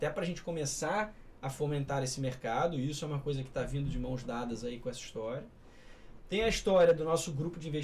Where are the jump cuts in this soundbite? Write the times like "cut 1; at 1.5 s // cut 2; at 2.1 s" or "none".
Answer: none